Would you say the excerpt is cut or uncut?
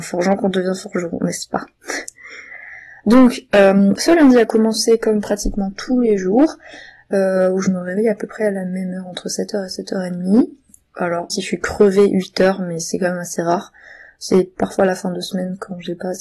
cut